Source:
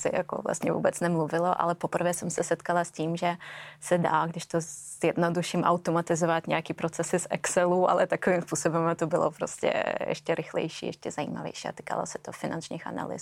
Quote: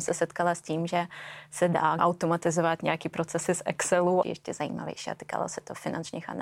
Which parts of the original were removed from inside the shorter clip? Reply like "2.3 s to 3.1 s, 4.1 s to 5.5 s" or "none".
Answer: 4.3 s to 5.6 s, 7.9 s to 10.8 s